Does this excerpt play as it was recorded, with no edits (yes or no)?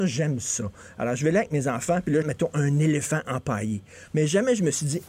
no